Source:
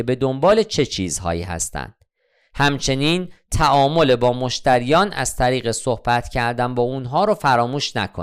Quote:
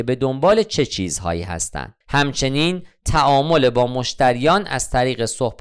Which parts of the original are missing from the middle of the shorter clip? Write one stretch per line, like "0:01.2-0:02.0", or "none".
0:02.0-0:02.5